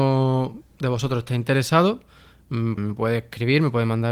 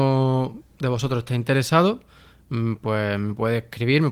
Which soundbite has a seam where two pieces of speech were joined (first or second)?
first